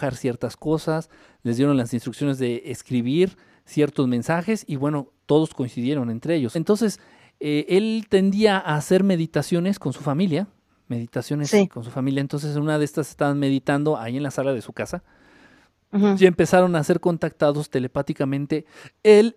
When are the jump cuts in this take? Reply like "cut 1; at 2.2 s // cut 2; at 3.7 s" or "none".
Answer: cut 1; at 6.5 s

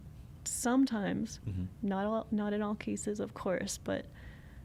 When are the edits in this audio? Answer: cut 1; at 1.7 s

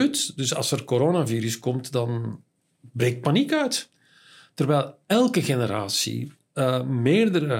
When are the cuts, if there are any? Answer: none

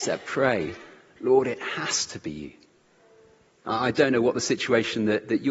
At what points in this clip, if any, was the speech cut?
none

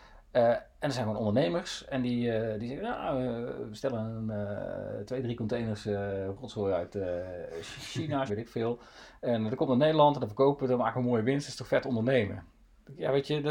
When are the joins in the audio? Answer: cut 1; at 8.3 s

